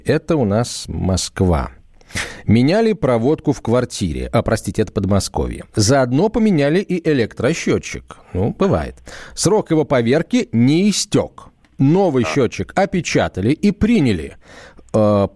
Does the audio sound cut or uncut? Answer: uncut